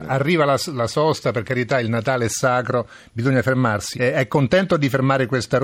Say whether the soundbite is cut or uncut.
cut